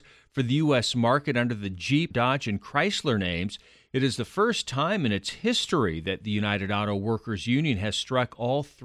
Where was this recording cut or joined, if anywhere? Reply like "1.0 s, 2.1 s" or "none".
2.1 s